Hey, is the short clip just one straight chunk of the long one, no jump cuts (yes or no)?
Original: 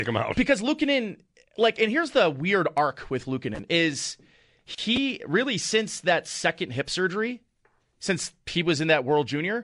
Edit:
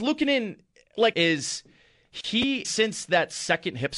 no